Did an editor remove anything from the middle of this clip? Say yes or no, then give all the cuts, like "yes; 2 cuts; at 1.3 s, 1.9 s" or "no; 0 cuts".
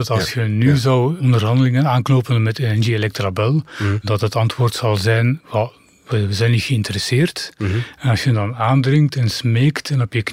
no; 0 cuts